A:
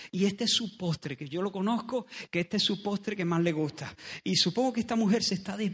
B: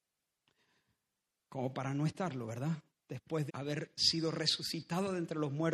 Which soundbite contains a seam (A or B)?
B